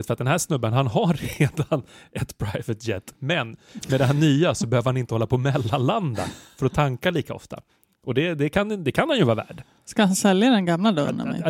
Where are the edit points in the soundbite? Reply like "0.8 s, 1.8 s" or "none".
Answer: none